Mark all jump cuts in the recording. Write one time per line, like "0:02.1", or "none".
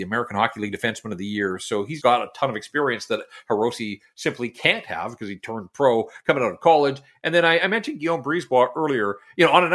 0:02.0